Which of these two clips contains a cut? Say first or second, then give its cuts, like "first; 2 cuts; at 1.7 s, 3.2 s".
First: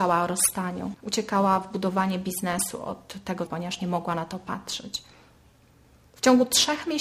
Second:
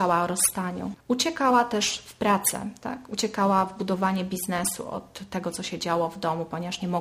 first; 2 cuts; at 1.0 s, 3.5 s